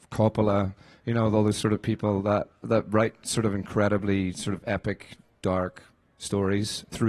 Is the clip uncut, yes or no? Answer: yes